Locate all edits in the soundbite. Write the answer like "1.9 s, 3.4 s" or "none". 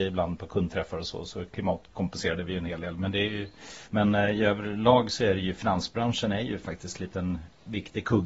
3.9 s